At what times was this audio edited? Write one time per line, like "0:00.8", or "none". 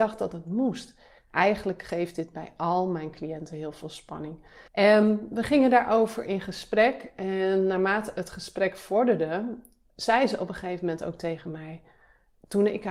0:01.2
0:04.7